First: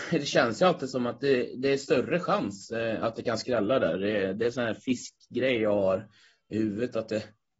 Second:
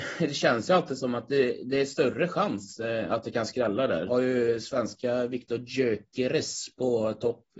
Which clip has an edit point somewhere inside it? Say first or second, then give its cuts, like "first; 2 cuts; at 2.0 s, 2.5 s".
second; 1 cut; at 4.1 s